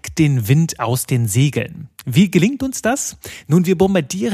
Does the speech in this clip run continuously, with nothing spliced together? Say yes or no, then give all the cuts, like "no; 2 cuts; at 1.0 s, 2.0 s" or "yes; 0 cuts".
yes; 0 cuts